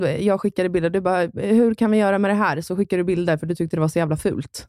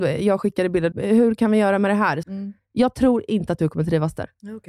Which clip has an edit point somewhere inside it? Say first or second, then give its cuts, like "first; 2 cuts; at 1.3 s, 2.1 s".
second; 2 cuts; at 0.9 s, 2.2 s